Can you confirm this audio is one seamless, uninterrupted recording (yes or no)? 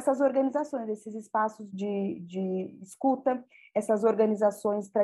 no